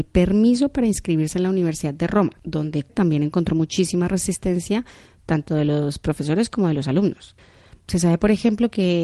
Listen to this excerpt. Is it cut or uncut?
cut